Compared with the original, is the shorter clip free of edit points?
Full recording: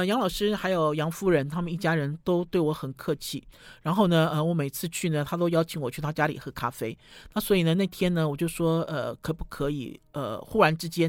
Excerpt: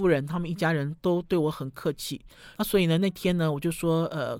no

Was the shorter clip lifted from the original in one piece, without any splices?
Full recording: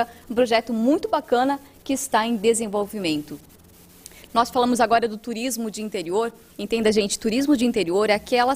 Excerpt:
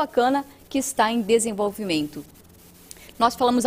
yes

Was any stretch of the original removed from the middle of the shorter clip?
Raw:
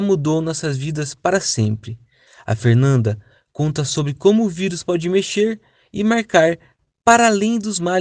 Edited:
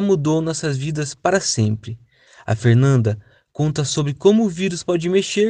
no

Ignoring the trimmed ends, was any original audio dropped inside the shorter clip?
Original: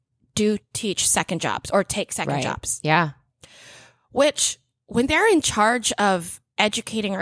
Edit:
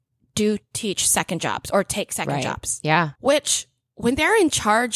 yes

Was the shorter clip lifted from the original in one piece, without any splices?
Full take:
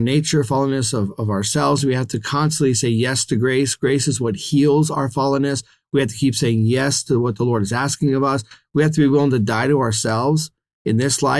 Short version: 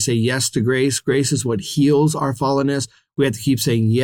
yes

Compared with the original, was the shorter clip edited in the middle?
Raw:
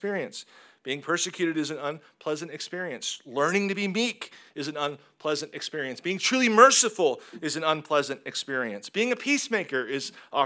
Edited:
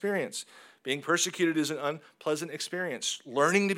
no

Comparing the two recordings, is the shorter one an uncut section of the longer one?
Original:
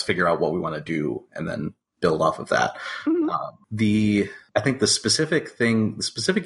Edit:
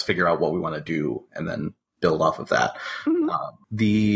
yes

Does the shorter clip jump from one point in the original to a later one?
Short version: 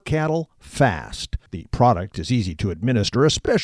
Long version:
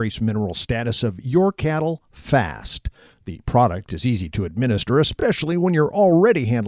yes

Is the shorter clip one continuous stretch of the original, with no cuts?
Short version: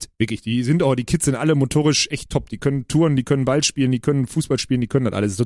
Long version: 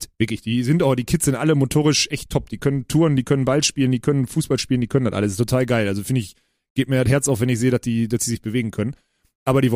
yes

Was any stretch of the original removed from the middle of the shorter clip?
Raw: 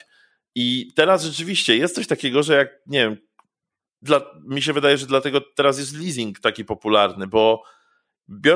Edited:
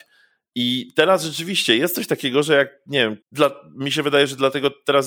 yes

